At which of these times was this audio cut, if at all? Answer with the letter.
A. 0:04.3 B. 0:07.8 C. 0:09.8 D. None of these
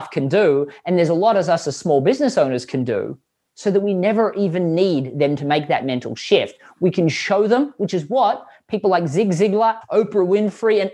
C